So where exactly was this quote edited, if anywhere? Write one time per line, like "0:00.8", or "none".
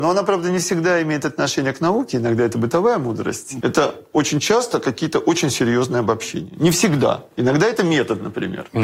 0:03.6